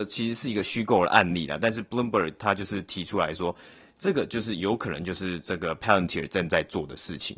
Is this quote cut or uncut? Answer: uncut